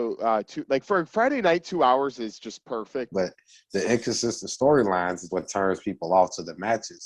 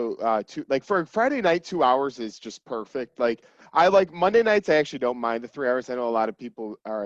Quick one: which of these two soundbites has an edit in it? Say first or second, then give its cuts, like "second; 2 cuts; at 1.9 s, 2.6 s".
first; 2 cuts; at 3.1 s, 5.3 s